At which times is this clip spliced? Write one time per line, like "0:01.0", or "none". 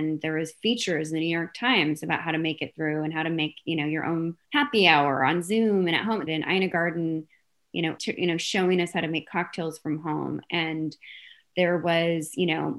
0:04.4
0:06.3
0:08.0